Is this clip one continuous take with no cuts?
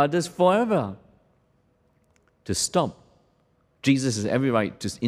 yes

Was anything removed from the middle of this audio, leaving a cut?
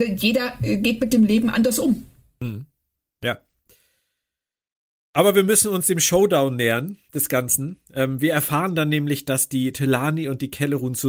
no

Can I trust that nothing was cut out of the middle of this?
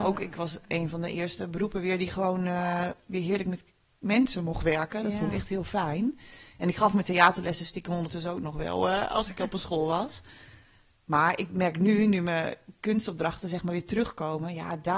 yes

